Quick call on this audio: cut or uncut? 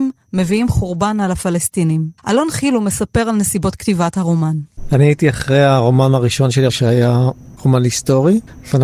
cut